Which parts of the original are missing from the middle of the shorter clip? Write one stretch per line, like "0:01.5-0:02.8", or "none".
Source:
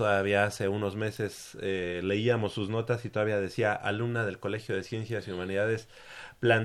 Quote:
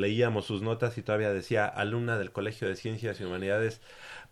none